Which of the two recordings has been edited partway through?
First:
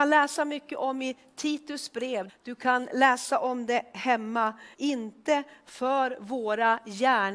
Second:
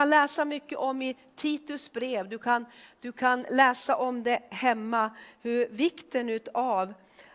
first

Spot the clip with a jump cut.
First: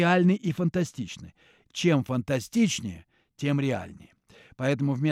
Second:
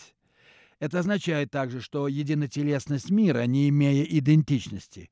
first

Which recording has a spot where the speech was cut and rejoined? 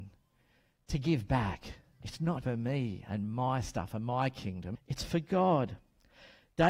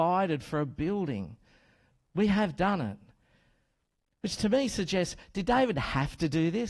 first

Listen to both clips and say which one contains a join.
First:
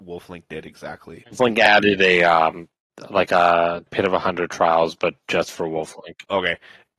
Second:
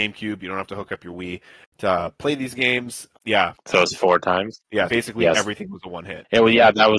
second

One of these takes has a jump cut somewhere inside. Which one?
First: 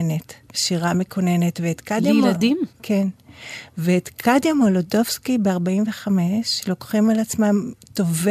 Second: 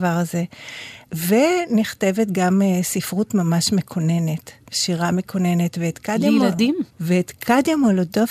second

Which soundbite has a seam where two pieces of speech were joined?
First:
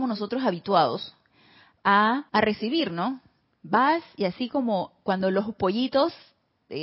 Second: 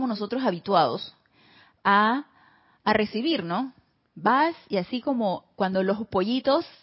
first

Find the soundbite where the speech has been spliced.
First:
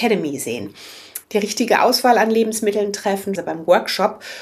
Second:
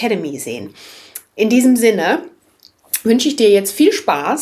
first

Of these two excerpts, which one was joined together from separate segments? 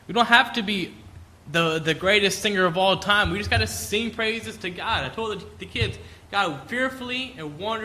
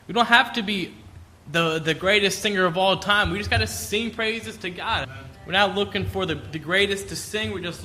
second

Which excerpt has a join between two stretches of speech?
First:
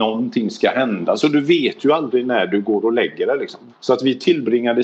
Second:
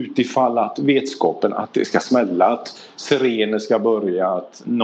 first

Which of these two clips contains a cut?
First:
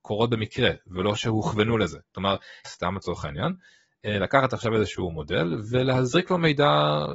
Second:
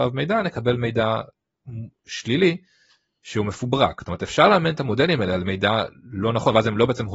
first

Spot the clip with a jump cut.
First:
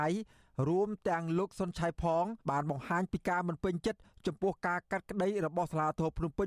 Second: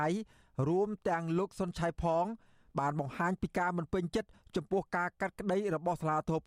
first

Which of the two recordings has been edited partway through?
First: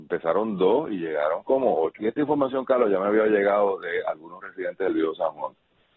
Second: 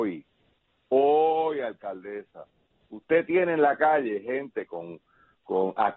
first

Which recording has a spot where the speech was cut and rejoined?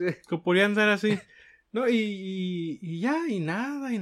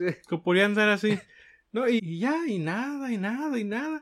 second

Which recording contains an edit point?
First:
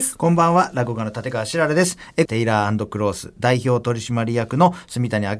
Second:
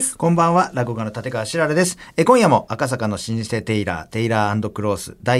first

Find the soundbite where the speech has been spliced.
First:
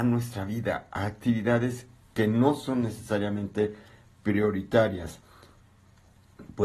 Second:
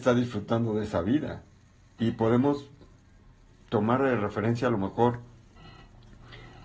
second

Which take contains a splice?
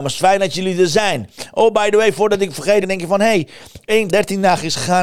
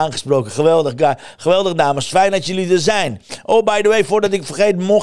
first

